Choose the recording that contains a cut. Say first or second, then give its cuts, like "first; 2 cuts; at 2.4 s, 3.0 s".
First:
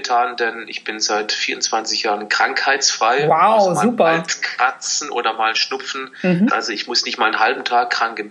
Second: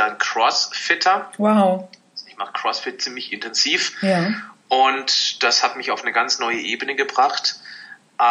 first; 1 cut; at 6.5 s